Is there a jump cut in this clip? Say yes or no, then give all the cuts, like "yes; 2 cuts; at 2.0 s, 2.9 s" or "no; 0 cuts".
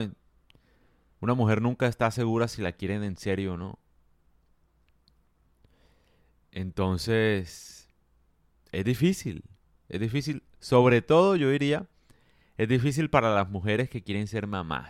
no; 0 cuts